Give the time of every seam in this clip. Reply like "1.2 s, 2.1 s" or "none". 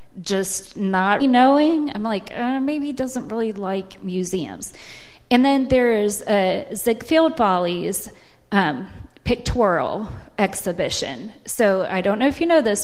1.2 s